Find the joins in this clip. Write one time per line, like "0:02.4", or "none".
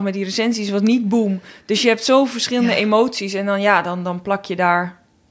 none

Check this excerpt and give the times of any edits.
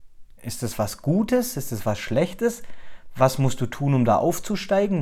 none

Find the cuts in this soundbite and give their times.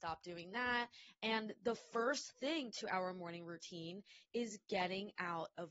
0:01.1

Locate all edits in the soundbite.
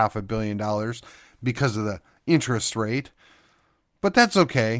none

